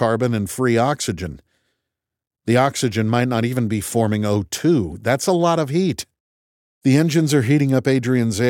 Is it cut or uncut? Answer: uncut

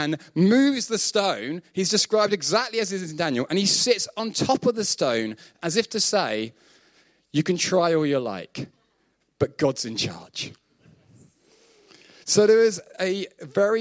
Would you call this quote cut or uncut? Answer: uncut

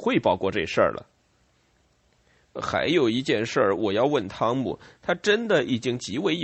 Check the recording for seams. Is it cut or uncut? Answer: uncut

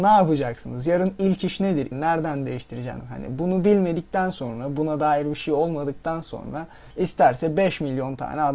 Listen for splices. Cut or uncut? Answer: cut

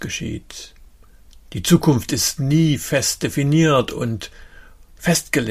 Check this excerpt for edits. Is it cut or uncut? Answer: uncut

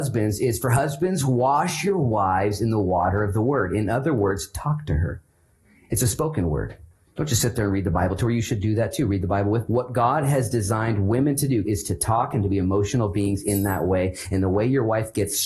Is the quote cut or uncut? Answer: cut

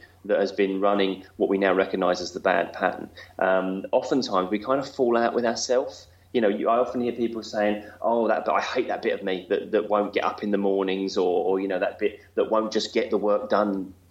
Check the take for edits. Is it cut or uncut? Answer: uncut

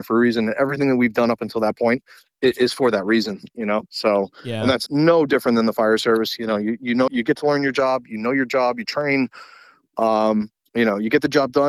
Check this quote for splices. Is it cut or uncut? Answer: cut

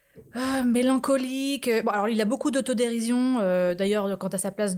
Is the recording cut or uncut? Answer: uncut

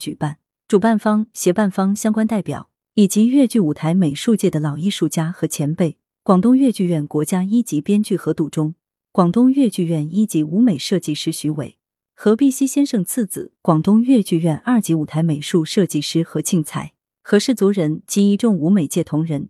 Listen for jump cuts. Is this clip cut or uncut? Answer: uncut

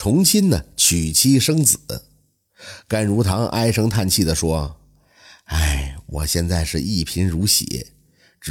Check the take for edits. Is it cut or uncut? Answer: uncut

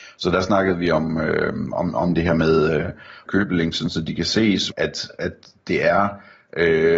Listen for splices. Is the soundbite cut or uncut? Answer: cut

